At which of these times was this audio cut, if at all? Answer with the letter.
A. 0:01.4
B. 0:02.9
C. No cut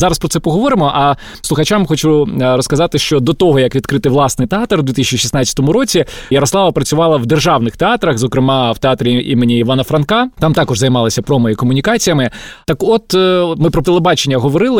A